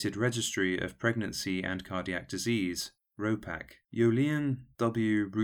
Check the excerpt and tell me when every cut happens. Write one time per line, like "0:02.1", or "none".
0:03.8

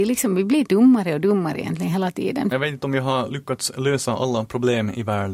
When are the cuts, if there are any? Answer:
0:02.5

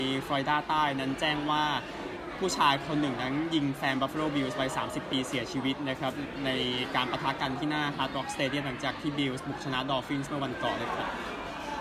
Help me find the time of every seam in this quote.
0:10.8

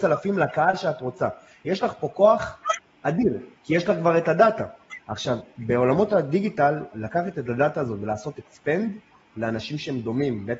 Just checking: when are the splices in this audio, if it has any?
none

